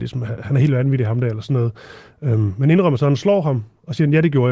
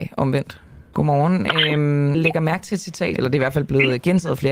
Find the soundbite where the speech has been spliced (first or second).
second